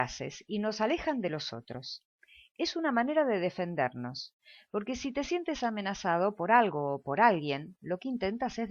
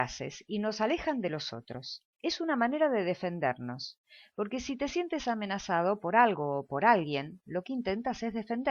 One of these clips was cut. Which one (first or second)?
second